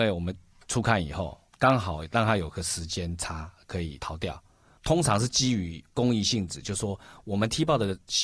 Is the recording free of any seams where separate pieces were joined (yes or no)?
no